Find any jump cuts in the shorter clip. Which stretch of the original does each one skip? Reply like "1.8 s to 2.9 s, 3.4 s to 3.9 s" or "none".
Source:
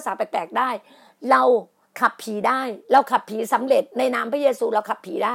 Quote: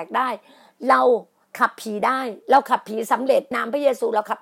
3.9 s to 4.1 s